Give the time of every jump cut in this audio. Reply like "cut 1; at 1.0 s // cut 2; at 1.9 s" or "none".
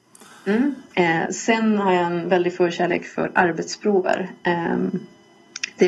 cut 1; at 0.9 s